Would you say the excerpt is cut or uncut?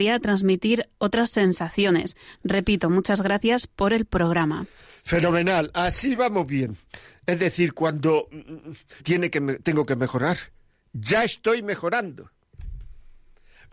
cut